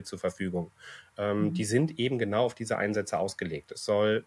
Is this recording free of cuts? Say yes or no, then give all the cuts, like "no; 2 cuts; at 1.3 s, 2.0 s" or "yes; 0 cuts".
yes; 0 cuts